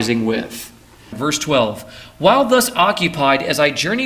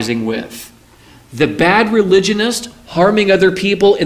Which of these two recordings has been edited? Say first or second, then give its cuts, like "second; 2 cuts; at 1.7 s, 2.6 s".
first; 1 cut; at 1.1 s